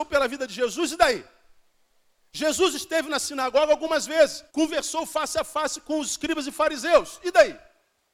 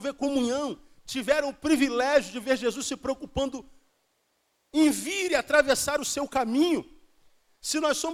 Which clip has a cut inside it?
first; 1 cut; at 4.5 s

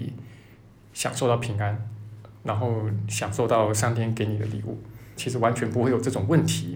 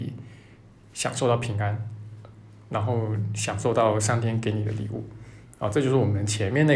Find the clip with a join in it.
first; 2 cuts; at 2.3 s, 5.2 s

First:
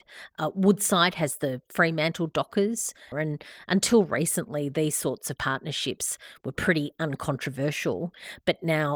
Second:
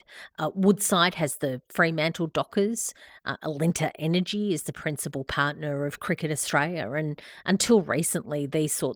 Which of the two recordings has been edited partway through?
first; 1 cut; at 3.1 s

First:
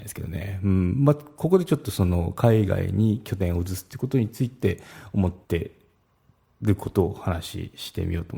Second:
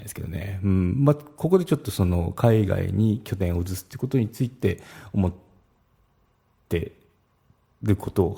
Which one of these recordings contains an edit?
first; 1 cut; at 5.4 s

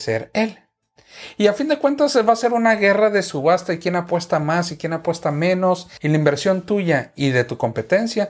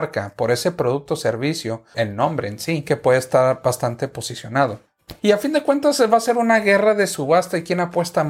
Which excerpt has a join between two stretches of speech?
second; 2 cuts; at 1.9 s, 5.2 s

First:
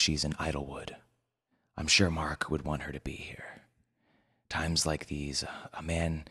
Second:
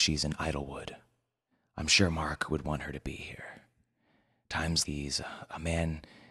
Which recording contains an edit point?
second; 1 cut; at 4.8 s

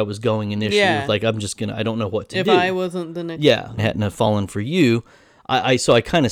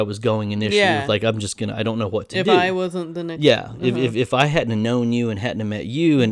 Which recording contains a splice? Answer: first; 1 cut; at 3.8 s

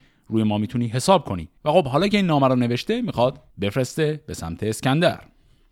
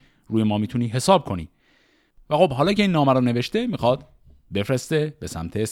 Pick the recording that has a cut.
first; 2 cuts; at 1.6 s, 3.5 s

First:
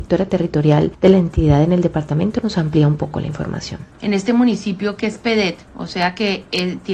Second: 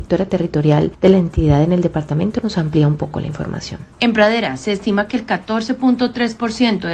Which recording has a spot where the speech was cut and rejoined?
first; 1 cut; at 3.9 s

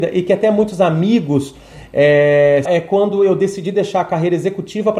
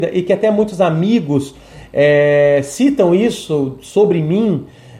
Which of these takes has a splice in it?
first; 1 cut; at 2.7 s

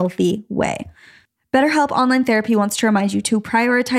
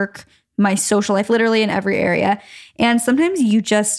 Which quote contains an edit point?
second; 1 cut; at 1.3 s

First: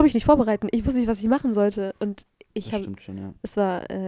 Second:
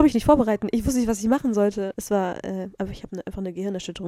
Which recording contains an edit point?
second; 1 cut; at 1.9 s

